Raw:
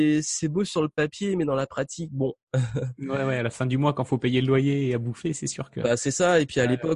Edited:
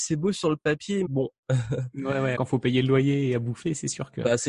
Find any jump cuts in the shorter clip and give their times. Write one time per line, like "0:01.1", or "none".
0:01.0
0:02.3